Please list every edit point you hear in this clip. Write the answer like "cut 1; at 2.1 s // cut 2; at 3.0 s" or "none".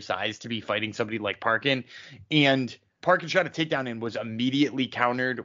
cut 1; at 3.0 s